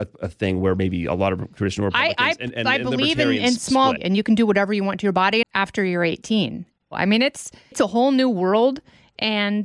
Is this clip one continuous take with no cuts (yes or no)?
no